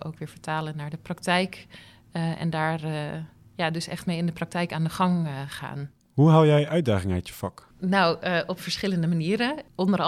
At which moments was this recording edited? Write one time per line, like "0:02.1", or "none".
none